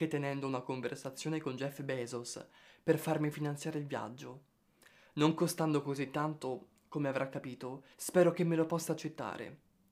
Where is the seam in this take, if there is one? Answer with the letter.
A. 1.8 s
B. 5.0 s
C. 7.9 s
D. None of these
C